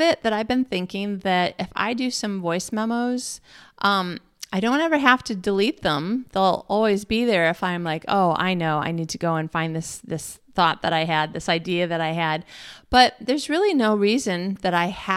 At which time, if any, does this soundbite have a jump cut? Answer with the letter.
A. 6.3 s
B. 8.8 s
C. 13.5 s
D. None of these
D